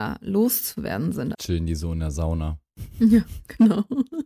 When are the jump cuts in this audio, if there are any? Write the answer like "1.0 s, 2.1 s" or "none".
1.3 s

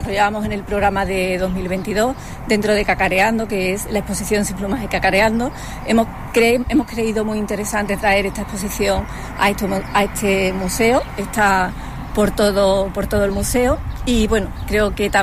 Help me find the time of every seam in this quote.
none

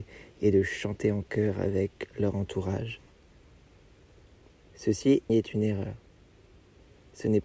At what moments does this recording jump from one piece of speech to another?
5.3 s

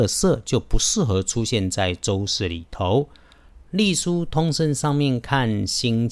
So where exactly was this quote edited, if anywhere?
none

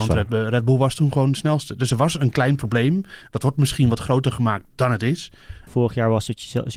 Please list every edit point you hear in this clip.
5.7 s

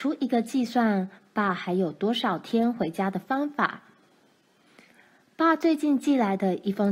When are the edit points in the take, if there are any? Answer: none

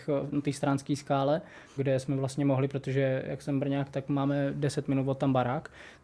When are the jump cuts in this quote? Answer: 1.8 s

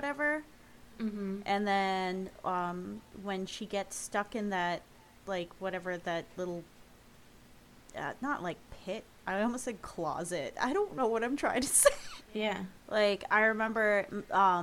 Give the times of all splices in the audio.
12.2 s

